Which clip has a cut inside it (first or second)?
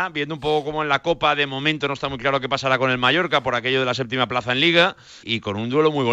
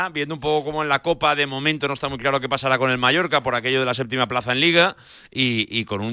first